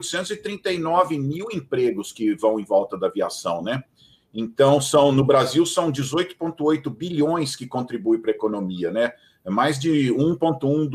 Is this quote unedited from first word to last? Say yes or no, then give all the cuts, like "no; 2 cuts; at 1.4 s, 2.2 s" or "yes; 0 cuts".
yes; 0 cuts